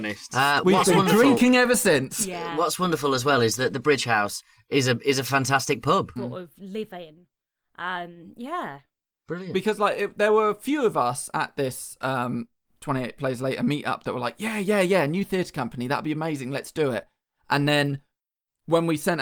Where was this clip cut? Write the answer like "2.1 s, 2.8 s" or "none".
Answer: 6.2 s